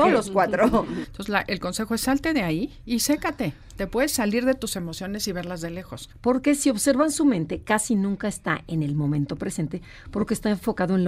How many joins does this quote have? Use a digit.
2